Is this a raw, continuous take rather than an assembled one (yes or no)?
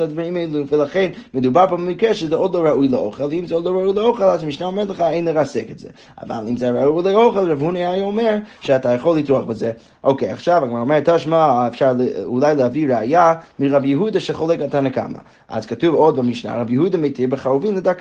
yes